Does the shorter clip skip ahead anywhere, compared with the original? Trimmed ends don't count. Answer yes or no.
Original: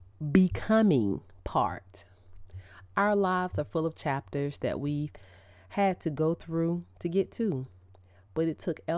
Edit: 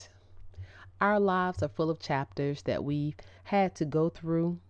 yes